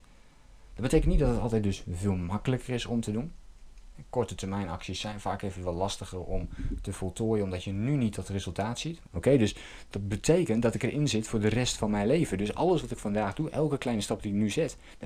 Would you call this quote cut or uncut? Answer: cut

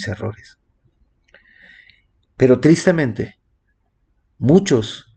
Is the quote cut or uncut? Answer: uncut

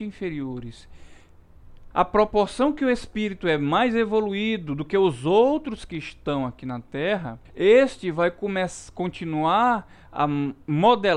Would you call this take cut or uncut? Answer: cut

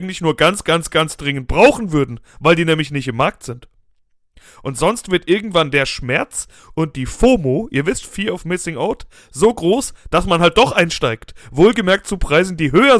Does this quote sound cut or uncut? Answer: cut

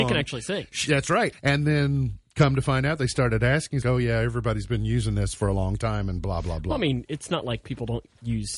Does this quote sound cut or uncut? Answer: cut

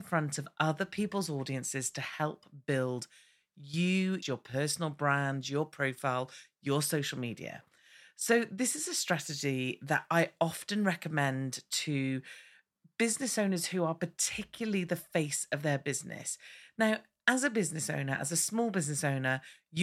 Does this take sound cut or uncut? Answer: cut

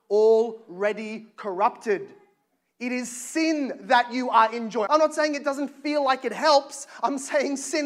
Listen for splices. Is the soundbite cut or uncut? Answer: cut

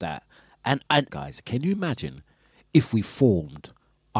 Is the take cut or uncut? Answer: cut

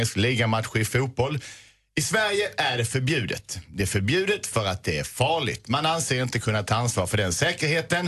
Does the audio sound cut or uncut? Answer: uncut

